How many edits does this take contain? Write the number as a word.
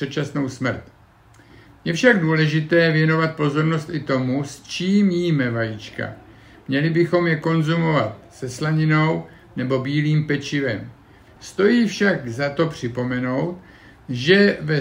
one